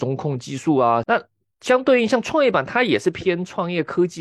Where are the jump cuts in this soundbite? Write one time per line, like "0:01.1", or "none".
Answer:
0:01.0